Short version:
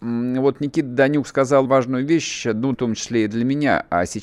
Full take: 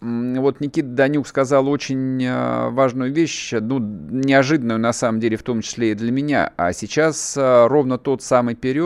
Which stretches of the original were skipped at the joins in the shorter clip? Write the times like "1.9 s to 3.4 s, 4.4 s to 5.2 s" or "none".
1.6 s to 2.7 s, 3.8 s to 5.4 s